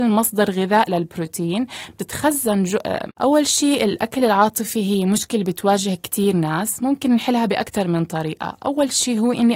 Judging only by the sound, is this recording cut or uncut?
cut